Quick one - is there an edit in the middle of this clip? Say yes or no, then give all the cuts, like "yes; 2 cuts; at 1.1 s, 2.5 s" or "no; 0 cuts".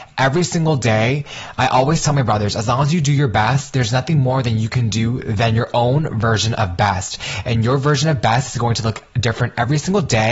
no; 0 cuts